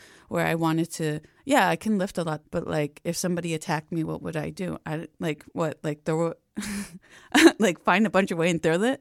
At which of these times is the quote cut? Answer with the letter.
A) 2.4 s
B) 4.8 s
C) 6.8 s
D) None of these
A